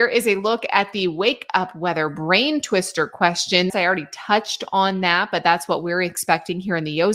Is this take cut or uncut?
cut